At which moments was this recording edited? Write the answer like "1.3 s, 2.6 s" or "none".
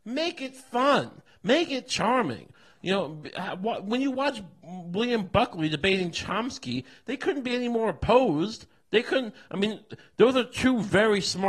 none